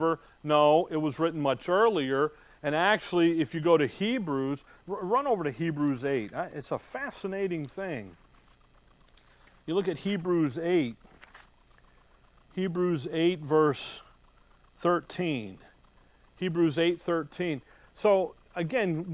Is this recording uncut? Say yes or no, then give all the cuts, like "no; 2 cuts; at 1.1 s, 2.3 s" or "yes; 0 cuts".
yes; 0 cuts